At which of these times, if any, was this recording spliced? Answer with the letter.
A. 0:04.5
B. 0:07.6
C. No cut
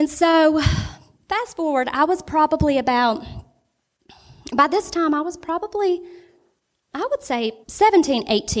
B